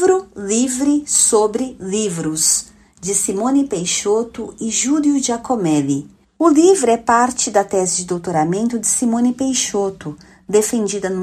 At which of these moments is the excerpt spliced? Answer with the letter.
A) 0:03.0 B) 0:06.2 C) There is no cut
B